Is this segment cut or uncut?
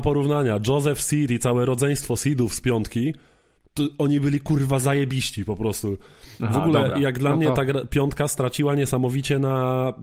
uncut